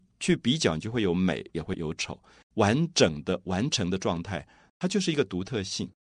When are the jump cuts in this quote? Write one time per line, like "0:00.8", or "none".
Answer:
0:02.4
0:04.7